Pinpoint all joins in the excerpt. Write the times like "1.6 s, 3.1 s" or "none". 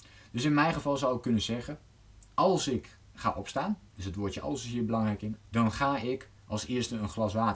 5.4 s